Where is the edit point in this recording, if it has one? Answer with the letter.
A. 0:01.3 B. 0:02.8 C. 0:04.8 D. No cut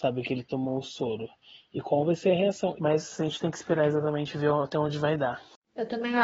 B